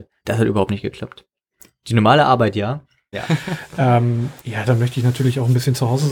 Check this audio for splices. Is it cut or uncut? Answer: cut